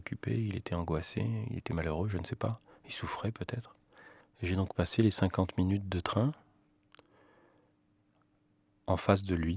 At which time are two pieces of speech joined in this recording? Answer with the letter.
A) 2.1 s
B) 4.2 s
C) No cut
B